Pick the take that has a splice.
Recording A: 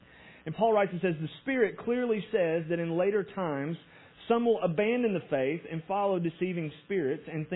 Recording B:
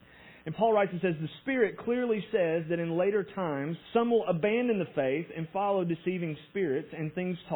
B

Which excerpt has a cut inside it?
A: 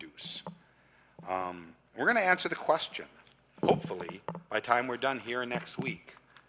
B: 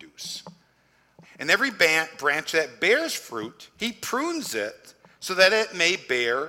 B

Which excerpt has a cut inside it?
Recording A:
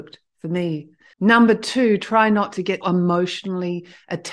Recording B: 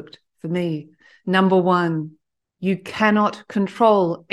A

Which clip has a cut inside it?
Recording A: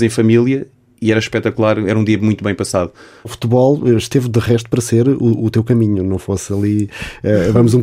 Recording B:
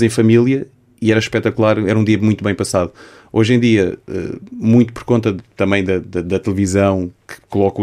A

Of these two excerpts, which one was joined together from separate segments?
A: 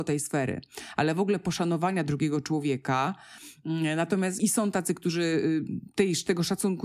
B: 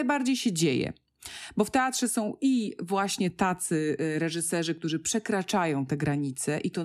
A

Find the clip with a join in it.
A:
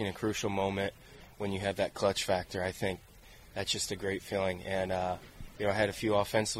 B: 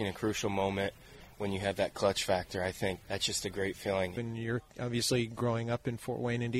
B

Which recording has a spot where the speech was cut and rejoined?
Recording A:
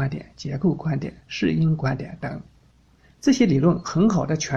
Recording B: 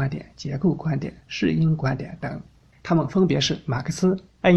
B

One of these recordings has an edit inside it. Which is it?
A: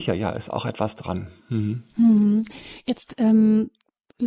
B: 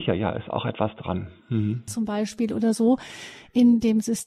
B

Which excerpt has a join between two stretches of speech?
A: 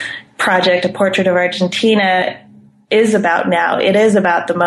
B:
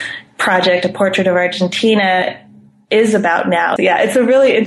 B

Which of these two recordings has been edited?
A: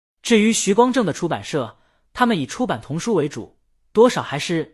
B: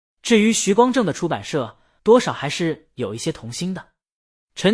B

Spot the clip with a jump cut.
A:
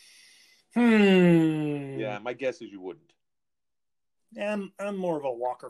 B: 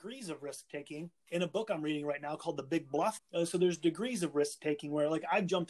B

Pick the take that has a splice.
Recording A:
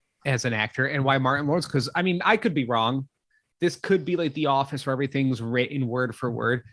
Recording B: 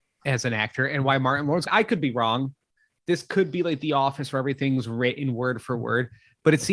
B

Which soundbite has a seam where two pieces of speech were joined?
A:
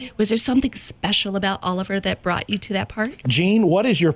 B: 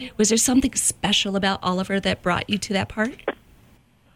A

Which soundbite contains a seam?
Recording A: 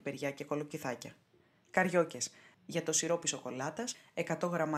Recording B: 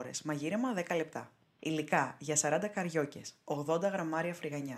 A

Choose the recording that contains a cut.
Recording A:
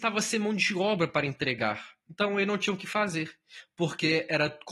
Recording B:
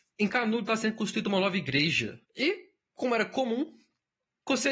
B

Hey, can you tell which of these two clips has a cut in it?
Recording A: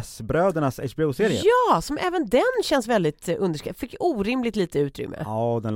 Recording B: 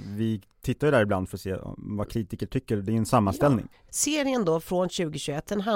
B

